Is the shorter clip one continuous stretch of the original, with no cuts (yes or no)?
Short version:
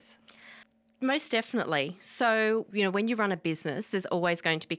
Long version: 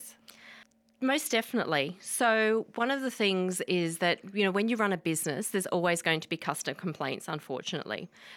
no